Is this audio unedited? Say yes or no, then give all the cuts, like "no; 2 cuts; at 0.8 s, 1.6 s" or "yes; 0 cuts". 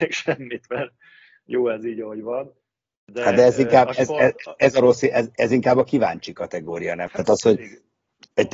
no; 1 cut; at 7.1 s